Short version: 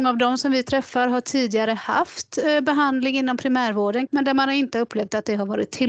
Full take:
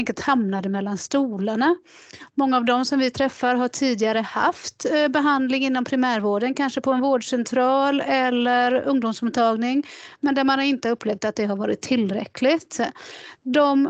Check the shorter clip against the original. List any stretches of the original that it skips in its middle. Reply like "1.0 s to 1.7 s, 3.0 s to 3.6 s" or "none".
6.5 s to 10.2 s